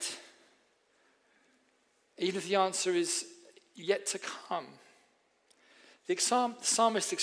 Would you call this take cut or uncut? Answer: uncut